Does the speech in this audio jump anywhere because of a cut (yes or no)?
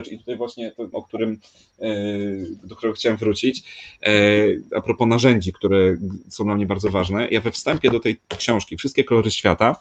yes